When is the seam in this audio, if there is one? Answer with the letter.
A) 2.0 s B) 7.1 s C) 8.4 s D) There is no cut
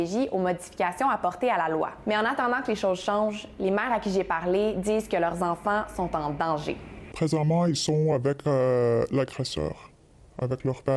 D